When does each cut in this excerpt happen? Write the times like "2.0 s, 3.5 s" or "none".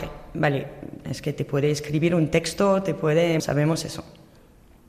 1.0 s, 3.4 s